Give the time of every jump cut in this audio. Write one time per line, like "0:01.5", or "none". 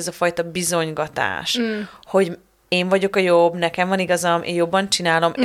none